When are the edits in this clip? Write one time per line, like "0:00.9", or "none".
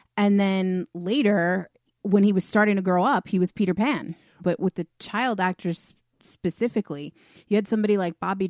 0:01.9
0:04.4